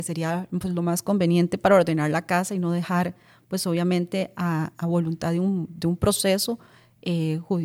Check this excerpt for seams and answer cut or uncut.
uncut